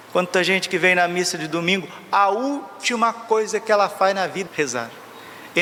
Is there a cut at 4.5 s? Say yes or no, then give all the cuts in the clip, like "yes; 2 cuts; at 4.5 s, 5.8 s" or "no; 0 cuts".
yes; 1 cut; at 4.5 s